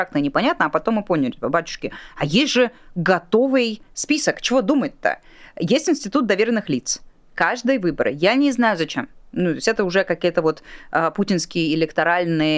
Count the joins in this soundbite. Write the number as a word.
zero